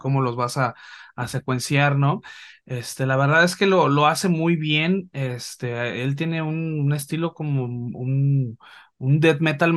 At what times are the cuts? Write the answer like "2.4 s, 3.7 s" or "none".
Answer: none